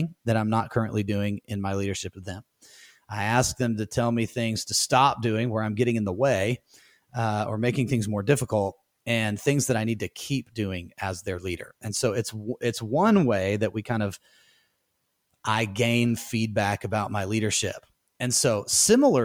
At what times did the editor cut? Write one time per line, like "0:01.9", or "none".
none